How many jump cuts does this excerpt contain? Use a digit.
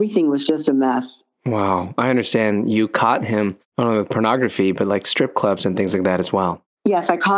0